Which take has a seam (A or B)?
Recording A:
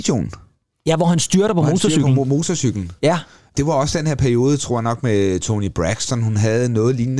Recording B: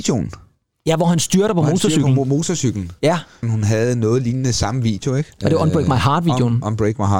B